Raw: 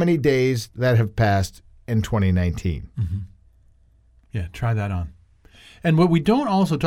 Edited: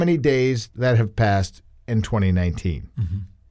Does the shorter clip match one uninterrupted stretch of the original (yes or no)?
yes